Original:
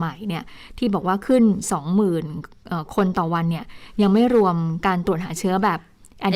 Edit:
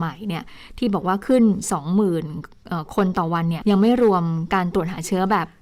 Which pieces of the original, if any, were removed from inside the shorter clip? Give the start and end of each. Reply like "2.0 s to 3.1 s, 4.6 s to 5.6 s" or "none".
3.6 s to 3.9 s